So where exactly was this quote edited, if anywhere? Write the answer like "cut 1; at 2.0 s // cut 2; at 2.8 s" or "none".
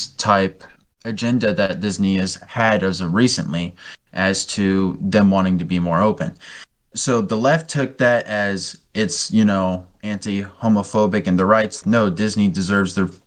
cut 1; at 6.9 s // cut 2; at 11.8 s